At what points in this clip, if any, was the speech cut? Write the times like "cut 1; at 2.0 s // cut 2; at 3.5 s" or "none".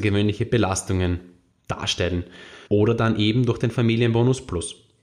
cut 1; at 2.7 s